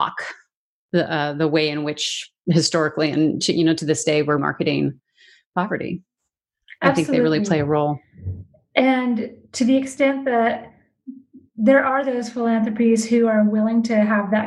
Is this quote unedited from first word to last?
no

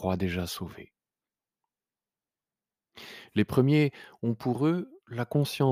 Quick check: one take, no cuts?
no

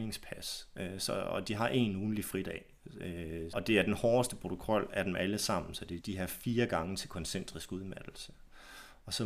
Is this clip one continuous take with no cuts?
no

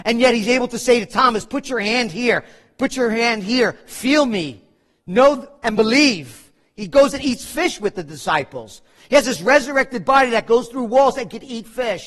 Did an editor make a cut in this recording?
no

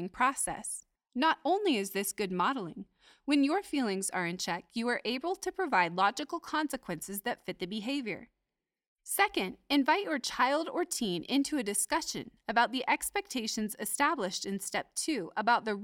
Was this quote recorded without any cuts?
no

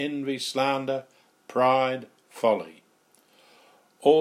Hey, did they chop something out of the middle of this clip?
no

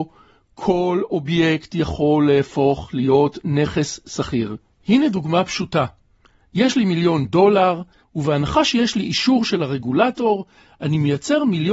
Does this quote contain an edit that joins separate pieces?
yes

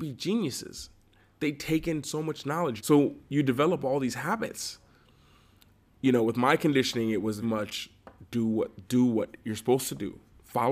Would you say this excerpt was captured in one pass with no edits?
no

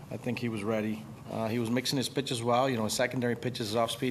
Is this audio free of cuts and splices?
no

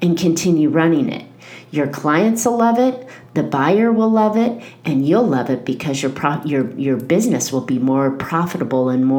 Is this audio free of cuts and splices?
yes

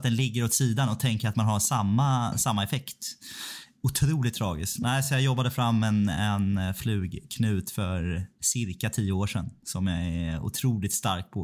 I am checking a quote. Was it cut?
no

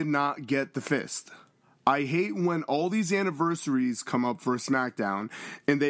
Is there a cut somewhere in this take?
no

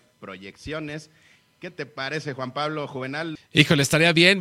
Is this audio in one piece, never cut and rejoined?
no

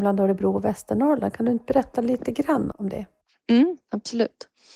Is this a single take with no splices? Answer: no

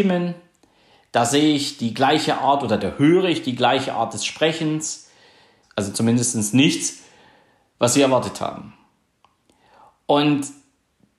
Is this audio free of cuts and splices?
no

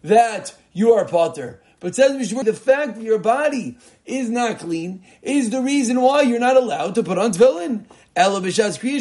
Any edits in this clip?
yes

